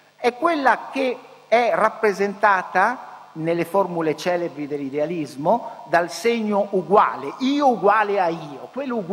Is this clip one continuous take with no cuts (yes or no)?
yes